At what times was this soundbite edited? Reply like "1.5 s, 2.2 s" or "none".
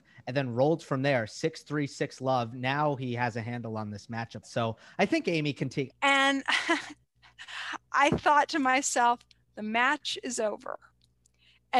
4.4 s, 5.9 s